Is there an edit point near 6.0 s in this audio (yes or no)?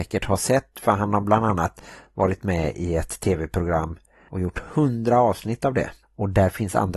yes